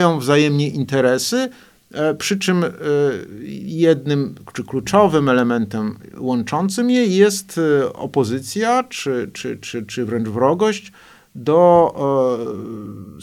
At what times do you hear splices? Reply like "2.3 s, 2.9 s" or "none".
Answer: none